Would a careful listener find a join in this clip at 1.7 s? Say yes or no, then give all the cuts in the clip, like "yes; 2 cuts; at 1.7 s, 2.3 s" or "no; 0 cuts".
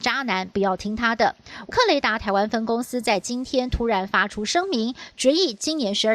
yes; 1 cut; at 1.7 s